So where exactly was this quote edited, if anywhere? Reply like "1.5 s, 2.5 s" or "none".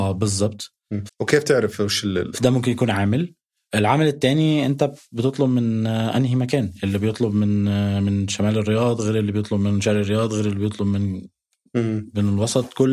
1.1 s, 2.3 s